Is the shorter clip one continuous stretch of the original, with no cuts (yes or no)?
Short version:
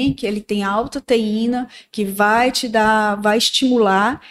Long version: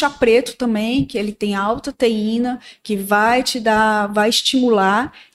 yes